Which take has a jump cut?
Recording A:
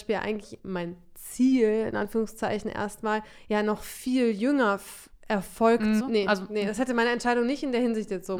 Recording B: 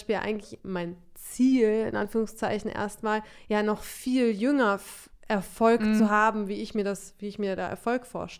A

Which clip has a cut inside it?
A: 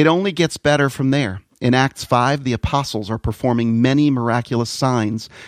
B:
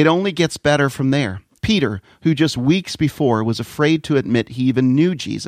B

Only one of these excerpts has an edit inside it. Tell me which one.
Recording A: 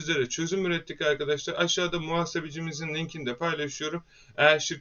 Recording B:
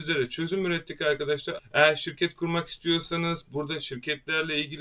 B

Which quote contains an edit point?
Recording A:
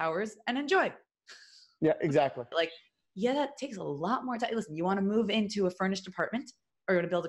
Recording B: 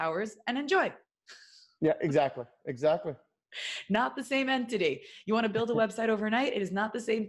A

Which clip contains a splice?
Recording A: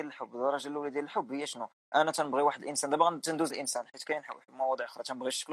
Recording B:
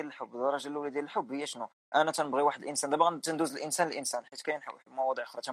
A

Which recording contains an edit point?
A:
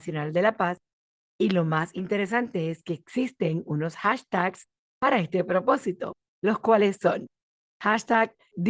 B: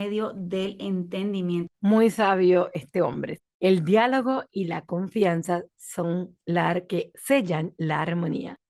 B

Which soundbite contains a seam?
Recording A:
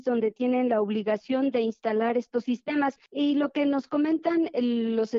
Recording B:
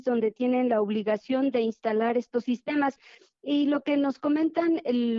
A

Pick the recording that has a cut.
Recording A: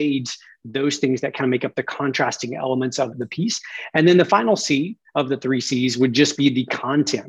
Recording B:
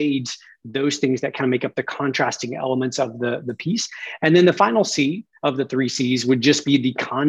A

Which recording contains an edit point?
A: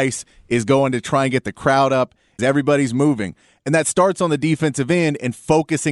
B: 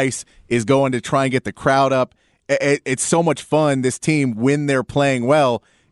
A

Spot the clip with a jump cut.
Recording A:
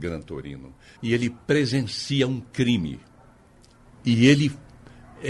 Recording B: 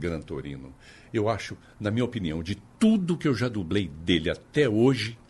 A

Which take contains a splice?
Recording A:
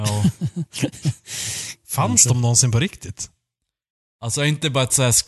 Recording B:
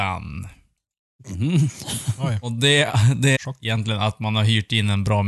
B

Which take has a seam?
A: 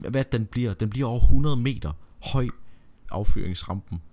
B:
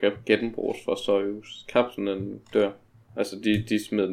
A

